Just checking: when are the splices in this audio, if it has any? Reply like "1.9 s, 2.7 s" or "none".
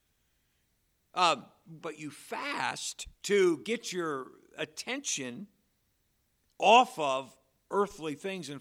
1.8 s, 3.1 s

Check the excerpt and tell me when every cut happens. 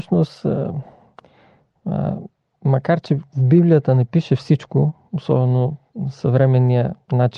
none

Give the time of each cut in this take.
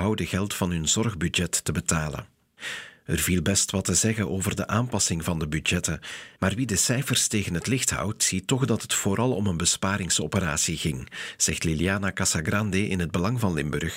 none

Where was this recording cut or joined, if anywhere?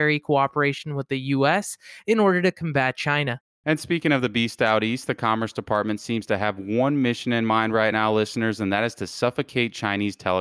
none

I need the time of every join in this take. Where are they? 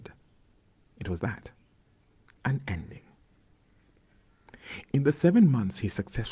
1.2 s

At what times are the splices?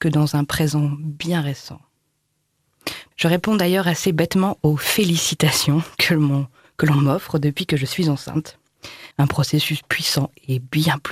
3.1 s, 9.1 s

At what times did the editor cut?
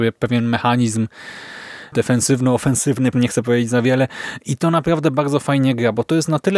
3.1 s

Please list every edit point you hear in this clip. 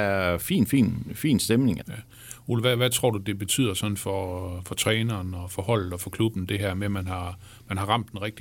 1.8 s

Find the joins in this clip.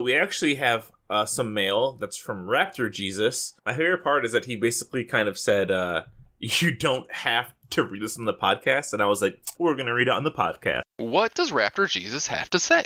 3.6 s, 9.6 s, 10.8 s

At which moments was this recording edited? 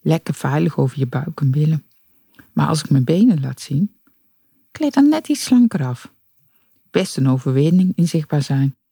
none

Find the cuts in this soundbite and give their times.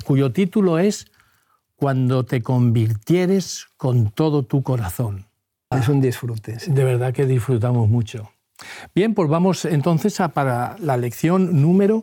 5.7 s

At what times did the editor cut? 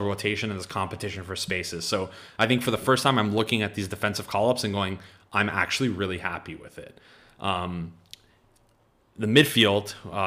none

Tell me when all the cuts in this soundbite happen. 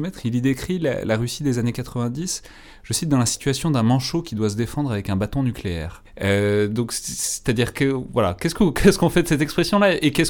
6.0 s

